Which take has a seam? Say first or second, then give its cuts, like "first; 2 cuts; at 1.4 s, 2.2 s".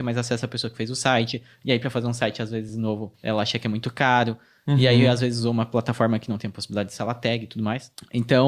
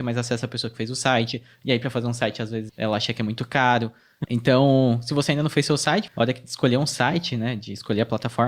second; 3 cuts; at 2.7 s, 4.2 s, 6.1 s